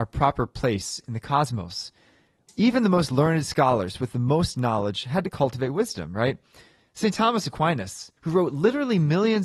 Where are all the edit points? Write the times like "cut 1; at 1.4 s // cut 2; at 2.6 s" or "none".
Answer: cut 1; at 2.5 s // cut 2; at 8.2 s